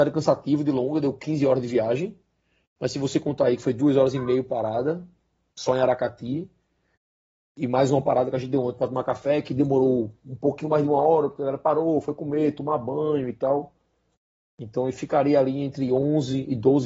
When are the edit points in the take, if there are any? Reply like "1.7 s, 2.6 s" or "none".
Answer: none